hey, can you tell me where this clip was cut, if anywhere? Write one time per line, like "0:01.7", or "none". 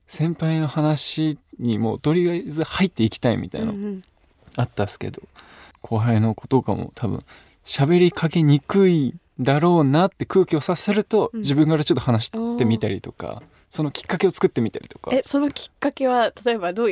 none

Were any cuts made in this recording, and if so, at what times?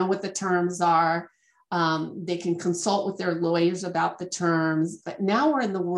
0:05.0

